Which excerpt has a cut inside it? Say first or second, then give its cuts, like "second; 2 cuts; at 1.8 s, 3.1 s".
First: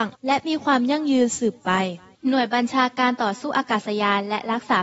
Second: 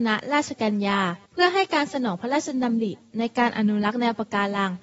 second; 1 cut; at 1.3 s